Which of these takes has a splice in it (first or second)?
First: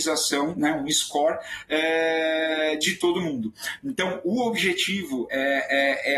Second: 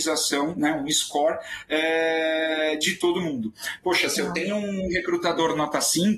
second